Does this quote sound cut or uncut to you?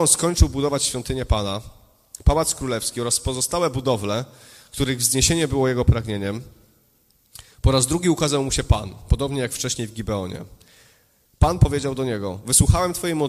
uncut